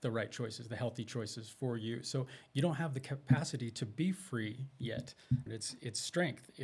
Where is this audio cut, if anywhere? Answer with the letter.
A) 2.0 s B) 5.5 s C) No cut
B